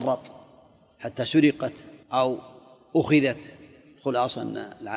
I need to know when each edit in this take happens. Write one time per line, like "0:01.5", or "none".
0:02.0